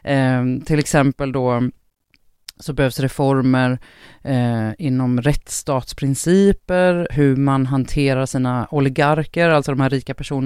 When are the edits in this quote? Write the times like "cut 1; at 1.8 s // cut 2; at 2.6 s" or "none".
cut 1; at 7.1 s